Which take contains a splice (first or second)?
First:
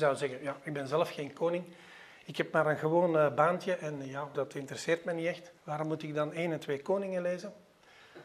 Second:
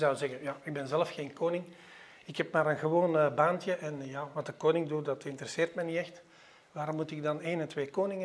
first